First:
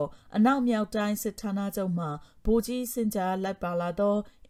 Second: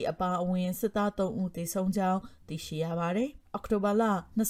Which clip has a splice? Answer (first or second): second